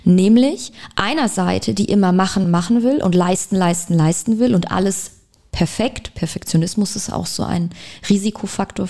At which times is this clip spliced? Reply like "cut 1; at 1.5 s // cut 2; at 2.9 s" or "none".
cut 1; at 2.4 s